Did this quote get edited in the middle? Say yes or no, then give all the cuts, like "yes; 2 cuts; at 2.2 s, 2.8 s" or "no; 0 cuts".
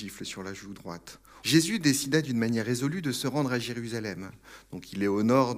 yes; 1 cut; at 1.4 s